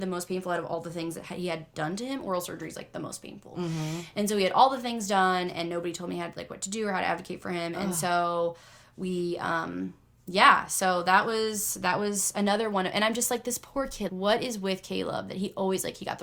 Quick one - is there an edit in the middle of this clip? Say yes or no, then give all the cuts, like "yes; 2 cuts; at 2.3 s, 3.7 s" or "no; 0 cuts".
yes; 1 cut; at 14.1 s